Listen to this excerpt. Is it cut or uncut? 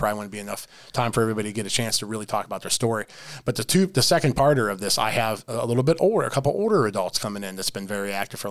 uncut